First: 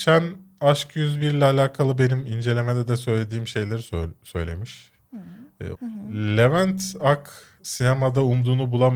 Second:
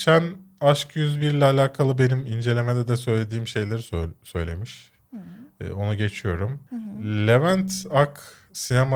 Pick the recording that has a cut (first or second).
first